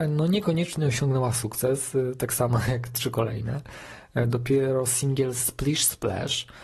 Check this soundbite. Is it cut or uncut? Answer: uncut